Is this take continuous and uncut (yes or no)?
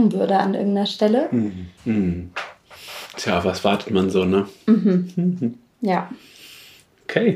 no